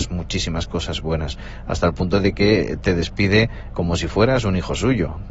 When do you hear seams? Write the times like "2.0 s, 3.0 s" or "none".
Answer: 3.7 s